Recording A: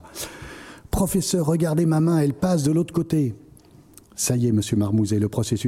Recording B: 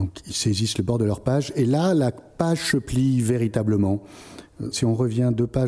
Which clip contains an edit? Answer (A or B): B